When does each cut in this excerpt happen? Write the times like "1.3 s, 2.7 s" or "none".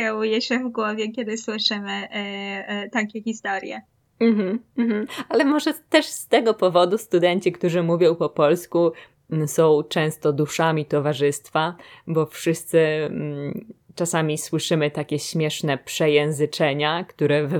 none